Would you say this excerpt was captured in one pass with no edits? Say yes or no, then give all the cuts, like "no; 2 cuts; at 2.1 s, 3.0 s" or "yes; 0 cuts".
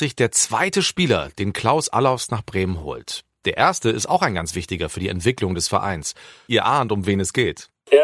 no; 1 cut; at 6.5 s